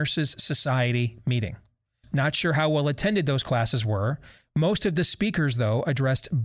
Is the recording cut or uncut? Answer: cut